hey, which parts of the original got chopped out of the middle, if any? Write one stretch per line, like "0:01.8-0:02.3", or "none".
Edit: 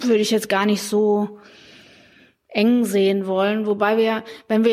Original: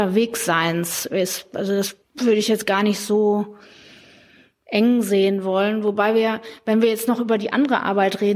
none

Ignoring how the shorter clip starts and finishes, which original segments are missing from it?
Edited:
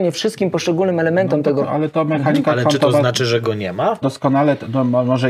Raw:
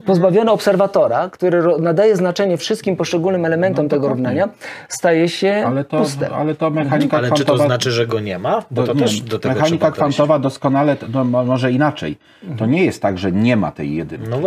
0:04.1-0:06.3
0:08.7-0:10.4

